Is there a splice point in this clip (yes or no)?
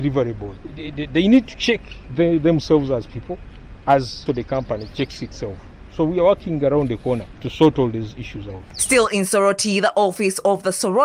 yes